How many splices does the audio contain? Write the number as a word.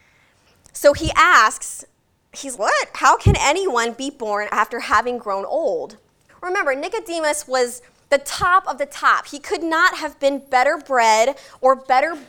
three